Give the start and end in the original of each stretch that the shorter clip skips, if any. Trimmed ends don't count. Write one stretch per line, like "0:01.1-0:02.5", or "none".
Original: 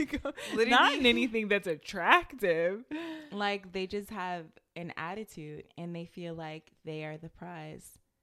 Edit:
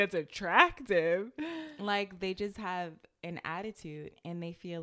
none